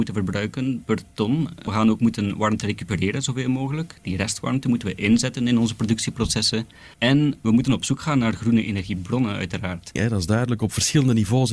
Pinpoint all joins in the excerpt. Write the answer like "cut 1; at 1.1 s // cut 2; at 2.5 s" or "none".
cut 1; at 6.9 s // cut 2; at 10.0 s

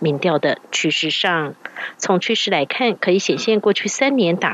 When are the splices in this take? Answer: cut 1; at 1.9 s

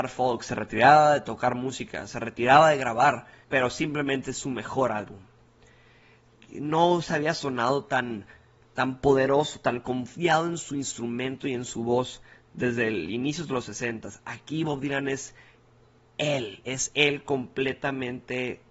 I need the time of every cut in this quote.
cut 1; at 3.4 s

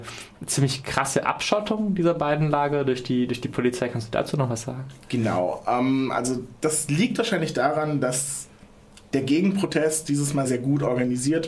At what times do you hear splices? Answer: cut 1; at 10.4 s

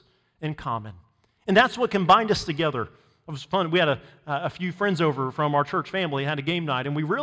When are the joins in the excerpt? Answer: none

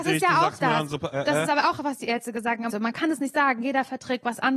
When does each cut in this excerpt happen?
cut 1; at 1.1 s // cut 2; at 2.7 s

